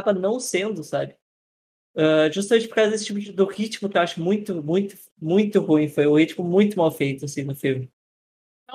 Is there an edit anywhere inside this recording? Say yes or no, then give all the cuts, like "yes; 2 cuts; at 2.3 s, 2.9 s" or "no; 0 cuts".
no; 0 cuts